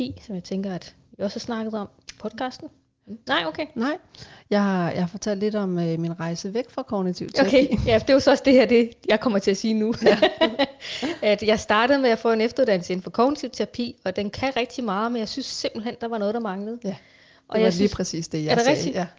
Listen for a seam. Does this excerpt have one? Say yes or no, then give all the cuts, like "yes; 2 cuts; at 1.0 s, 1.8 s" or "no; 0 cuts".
yes; 1 cut; at 3.3 s